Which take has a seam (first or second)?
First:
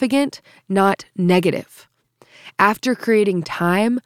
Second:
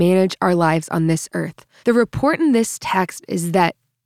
second